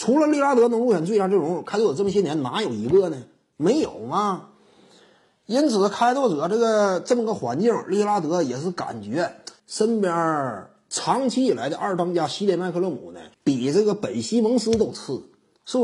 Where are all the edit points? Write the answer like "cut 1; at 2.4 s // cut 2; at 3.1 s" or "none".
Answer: cut 1; at 9.6 s // cut 2; at 13.3 s